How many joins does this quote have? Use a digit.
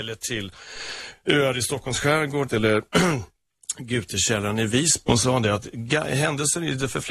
2